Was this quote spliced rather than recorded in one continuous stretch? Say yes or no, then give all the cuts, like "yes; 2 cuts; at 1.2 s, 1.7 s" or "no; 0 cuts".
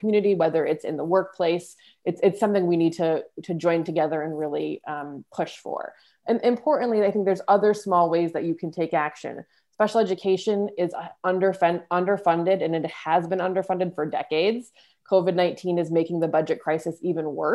no; 0 cuts